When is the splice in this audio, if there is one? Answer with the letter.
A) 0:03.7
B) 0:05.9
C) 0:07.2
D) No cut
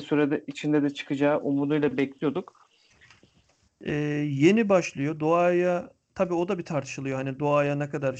A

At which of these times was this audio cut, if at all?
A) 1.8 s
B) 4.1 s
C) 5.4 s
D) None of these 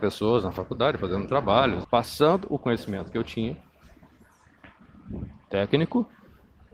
A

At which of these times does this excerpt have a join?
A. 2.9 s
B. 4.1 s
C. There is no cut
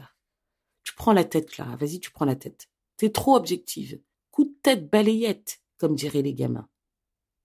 B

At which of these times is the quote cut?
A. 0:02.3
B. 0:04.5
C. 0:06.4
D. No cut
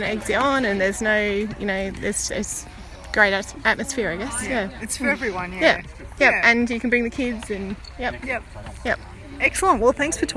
A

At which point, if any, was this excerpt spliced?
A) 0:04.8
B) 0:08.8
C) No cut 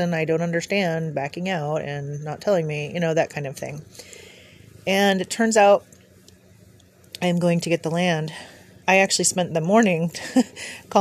B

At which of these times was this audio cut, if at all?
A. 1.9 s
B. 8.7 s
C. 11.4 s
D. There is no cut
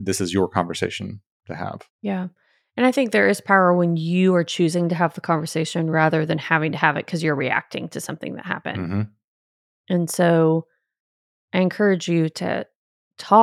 A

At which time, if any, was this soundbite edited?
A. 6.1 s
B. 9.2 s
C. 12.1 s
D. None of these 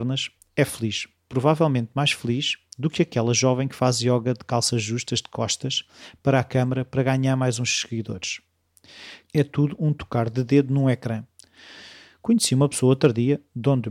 B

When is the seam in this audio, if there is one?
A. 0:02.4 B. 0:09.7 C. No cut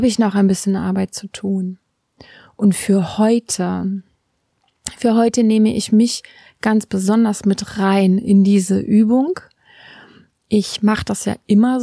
C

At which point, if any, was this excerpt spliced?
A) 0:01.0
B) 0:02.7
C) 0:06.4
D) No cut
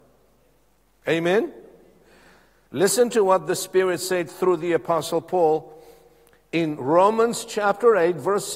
A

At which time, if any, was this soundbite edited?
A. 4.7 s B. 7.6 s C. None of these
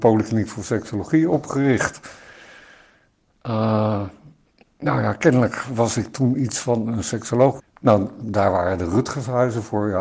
B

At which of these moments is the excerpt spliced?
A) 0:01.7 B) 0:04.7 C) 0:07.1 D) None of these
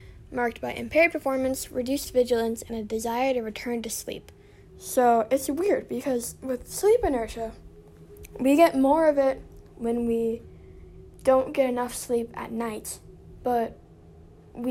B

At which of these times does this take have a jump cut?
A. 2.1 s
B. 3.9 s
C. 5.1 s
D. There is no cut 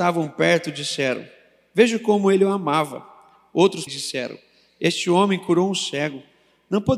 B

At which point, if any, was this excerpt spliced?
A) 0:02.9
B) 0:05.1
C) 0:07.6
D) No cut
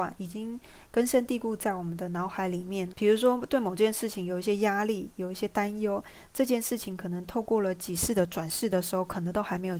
A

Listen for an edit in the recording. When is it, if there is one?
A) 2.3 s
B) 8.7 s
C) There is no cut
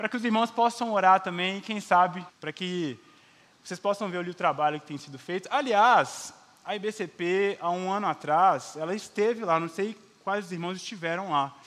A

